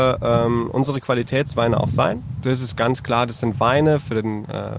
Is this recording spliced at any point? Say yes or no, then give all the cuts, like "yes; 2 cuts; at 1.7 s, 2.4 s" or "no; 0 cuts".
yes; 1 cut; at 2.4 s